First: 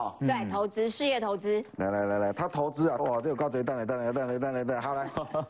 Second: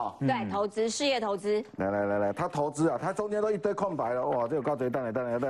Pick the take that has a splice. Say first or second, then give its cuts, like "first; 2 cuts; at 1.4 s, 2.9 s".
first; 1 cut; at 3.0 s